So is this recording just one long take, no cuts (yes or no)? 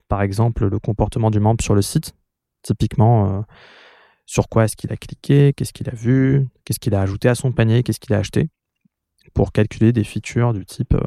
yes